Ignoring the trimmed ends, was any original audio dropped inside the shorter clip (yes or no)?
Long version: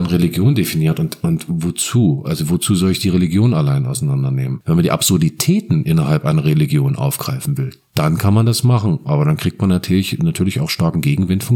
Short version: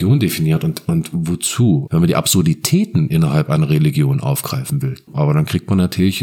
yes